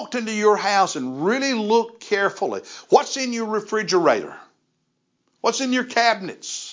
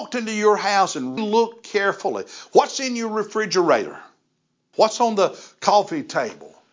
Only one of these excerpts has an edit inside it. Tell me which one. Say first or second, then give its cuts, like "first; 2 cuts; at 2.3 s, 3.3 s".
second; 2 cuts; at 1.2 s, 4.7 s